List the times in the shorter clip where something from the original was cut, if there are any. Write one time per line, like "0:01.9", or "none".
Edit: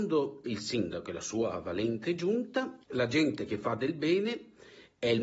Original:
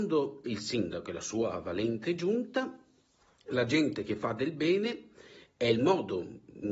0:02.8

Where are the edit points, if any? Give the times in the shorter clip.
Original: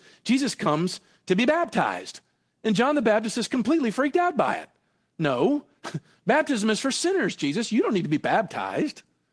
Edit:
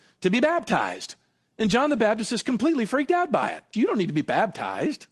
0:03.7

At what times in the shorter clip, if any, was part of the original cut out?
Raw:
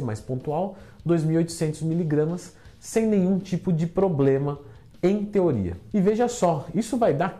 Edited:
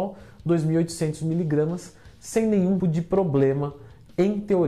0:02.8

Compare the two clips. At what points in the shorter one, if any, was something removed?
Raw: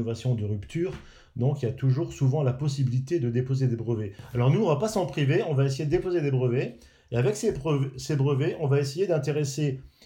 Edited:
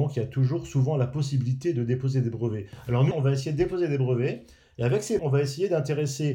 0:03.1
0:05.2

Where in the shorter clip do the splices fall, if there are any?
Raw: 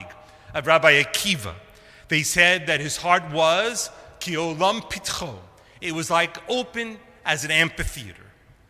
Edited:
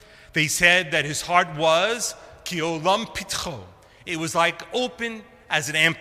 none

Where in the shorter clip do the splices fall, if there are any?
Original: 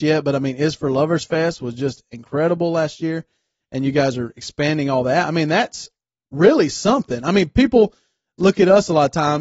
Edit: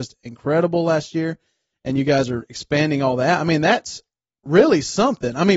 none

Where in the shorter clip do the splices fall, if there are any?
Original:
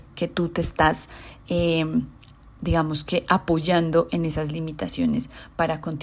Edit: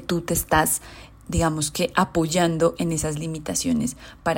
0:01.1

